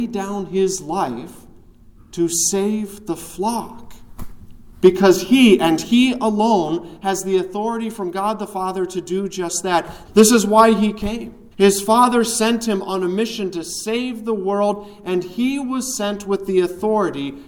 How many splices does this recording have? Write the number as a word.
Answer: two